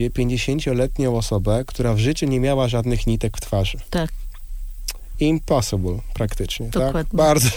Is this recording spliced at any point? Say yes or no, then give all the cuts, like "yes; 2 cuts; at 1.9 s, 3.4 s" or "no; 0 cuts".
no; 0 cuts